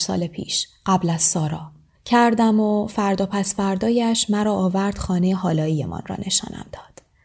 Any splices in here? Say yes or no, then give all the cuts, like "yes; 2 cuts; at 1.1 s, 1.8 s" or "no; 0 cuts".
yes; 1 cut; at 1.9 s